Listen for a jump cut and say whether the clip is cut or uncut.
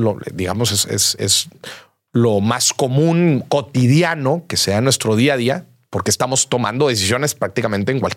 uncut